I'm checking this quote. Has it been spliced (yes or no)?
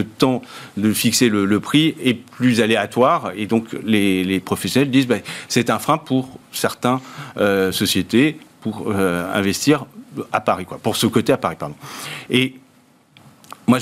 no